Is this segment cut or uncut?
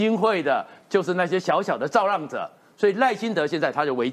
uncut